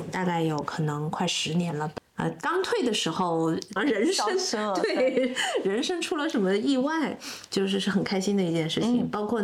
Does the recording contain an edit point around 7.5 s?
yes; 3 cuts; at 2.0 s, 3.8 s, 7.5 s

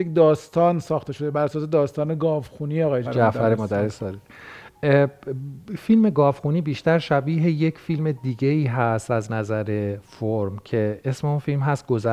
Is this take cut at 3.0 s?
yes; 1 cut; at 3.0 s

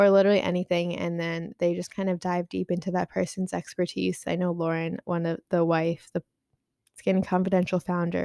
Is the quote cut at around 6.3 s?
no; 1 cut; at 4.2 s

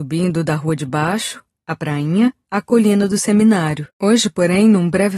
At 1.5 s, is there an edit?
no; 1 cut; at 3.9 s

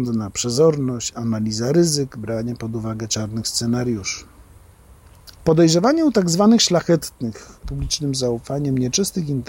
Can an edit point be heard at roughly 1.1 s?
no; 2 cuts; at 5.3 s, 7.6 s

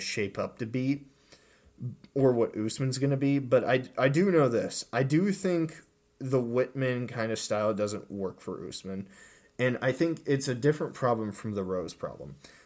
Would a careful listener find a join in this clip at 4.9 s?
no; 0 cuts

